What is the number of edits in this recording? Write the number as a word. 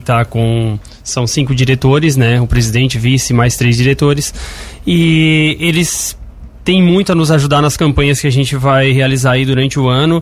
zero